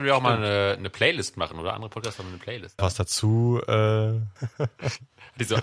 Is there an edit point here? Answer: yes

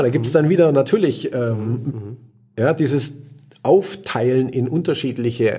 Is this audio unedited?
no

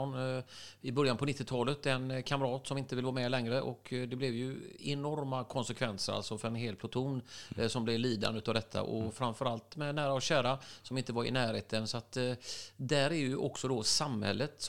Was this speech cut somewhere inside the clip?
no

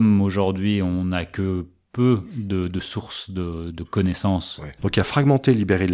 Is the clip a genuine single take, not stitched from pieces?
no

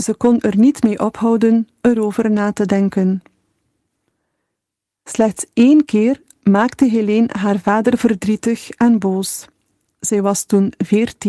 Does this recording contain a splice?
no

